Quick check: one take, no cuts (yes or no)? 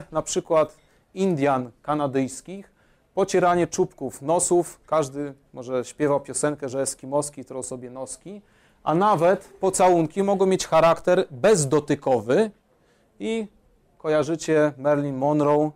yes